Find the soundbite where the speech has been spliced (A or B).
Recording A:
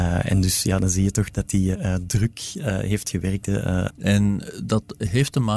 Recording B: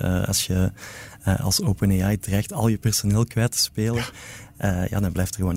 A